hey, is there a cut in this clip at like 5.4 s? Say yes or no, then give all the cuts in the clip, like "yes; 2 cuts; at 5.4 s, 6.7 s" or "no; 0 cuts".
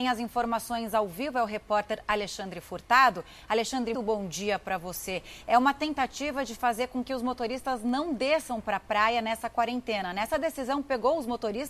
no; 1 cut; at 3.9 s